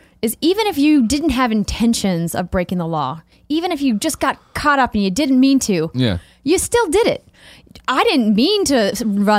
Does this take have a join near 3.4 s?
no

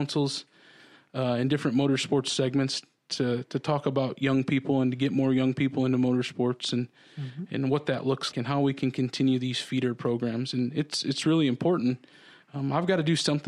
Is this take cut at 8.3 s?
yes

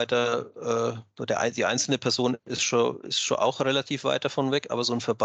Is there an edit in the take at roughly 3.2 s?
no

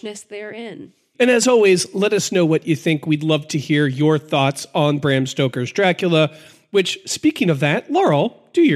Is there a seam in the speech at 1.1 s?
yes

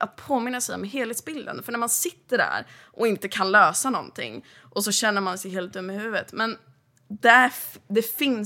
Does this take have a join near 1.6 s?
no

